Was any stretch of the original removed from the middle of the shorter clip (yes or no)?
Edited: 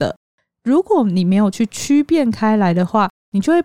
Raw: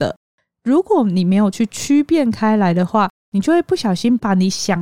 no